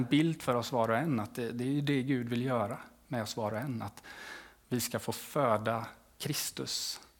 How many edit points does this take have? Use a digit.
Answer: 0